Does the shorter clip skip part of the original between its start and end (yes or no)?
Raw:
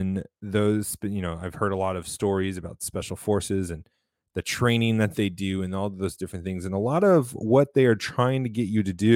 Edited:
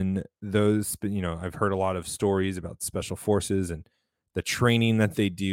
no